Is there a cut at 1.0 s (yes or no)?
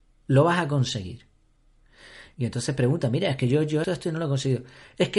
no